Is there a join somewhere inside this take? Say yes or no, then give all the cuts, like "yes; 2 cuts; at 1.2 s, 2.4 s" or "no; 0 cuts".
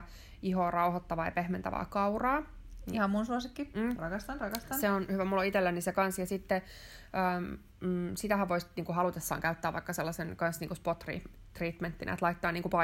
no; 0 cuts